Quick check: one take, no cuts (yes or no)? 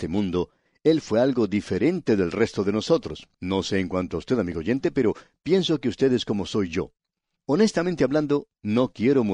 no